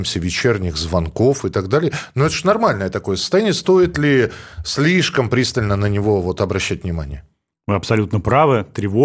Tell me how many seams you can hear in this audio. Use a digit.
0